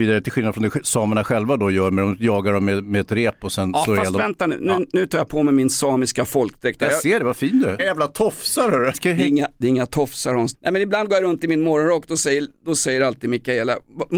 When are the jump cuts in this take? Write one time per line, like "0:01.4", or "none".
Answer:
0:07.8
0:08.9
0:10.5